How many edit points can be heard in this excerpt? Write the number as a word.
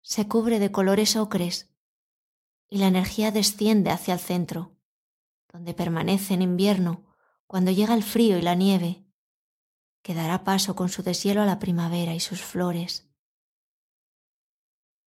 zero